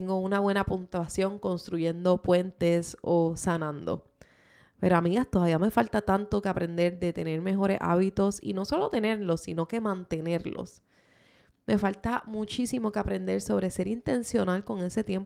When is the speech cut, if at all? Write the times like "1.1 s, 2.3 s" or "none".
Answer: none